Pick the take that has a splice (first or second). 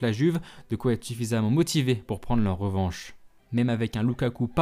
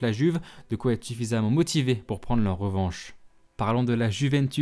first